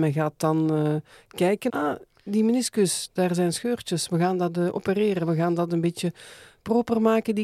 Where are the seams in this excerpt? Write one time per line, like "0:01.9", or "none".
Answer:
0:01.7